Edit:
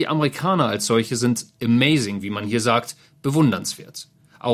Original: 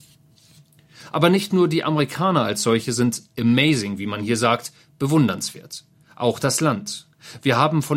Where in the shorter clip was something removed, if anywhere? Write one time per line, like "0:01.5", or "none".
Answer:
none